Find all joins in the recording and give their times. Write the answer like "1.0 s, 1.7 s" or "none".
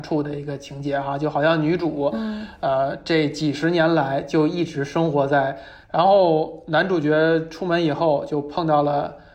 5.8 s